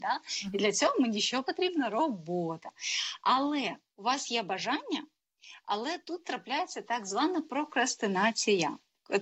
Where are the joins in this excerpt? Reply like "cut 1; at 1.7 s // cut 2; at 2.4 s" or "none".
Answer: none